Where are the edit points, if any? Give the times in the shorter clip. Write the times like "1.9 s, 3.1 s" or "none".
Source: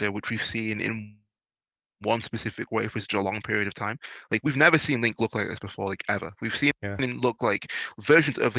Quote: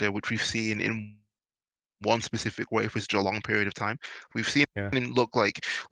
4.3 s